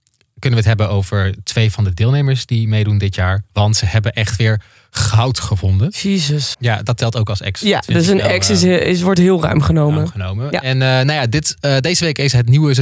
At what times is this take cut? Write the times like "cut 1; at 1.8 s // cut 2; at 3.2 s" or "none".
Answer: cut 1; at 6.5 s